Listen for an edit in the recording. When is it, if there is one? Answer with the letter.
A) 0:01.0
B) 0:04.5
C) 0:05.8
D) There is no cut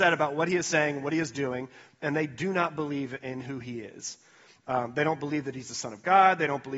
D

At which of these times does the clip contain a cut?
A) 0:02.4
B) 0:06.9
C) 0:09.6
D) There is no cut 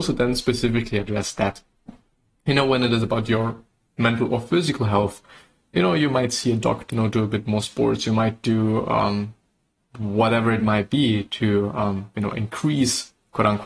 B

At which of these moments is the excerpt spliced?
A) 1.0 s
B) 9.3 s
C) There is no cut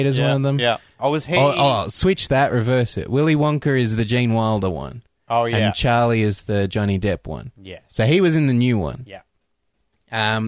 A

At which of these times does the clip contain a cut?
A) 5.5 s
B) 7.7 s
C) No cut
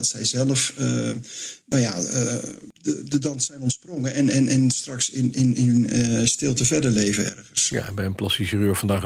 C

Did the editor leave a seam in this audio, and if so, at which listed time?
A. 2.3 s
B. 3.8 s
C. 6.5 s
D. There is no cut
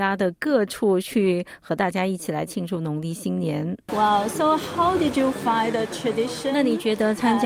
D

